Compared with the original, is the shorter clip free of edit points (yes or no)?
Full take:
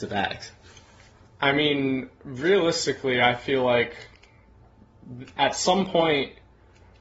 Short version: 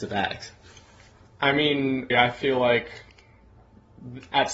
no